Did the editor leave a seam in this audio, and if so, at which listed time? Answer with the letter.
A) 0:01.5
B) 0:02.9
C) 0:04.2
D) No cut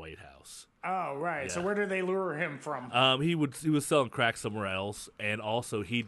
D